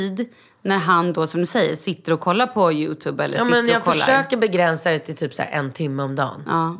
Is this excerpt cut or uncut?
uncut